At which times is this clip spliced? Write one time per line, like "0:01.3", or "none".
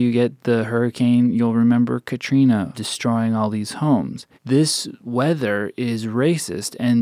0:02.7
0:04.3